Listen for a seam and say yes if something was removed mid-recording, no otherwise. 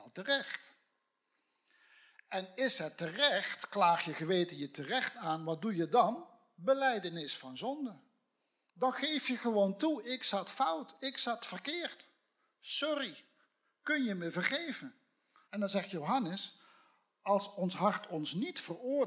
yes